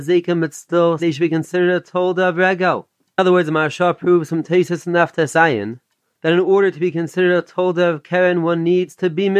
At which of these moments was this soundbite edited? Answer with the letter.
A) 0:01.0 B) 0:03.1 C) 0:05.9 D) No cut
A